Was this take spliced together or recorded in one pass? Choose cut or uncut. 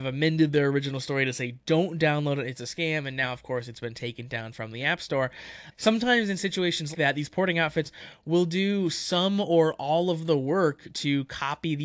cut